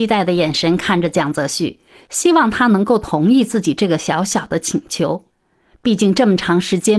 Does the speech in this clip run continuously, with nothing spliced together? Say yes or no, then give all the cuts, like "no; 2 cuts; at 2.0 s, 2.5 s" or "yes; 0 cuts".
yes; 0 cuts